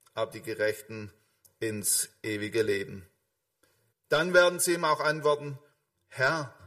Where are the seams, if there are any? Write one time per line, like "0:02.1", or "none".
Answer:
0:03.9